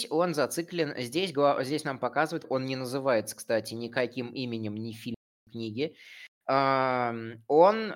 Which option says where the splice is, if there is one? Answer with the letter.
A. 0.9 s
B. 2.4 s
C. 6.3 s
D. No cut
B